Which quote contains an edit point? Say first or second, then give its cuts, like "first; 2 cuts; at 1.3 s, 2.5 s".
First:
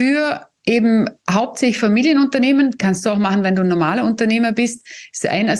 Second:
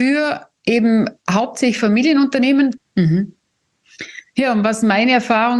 second; 1 cut; at 2.8 s